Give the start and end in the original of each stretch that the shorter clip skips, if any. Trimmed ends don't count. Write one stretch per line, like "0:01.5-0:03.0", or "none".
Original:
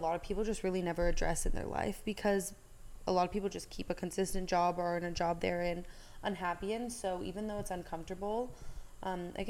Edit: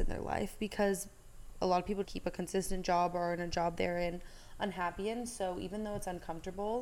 0:03.5-0:03.7